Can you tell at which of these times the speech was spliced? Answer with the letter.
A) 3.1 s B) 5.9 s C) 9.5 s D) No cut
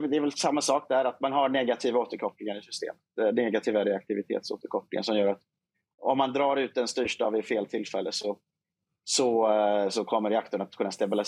D